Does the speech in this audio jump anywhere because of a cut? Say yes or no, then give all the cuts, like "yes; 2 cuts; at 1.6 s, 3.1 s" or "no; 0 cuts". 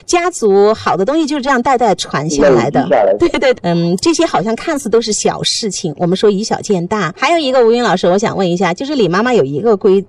no; 0 cuts